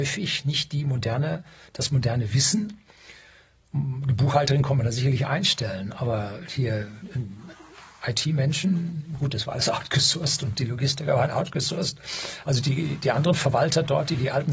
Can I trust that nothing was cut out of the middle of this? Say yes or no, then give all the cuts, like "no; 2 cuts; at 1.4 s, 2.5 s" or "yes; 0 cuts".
yes; 0 cuts